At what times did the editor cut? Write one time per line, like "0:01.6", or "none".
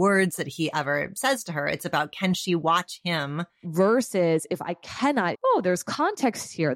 0:03.6
0:05.3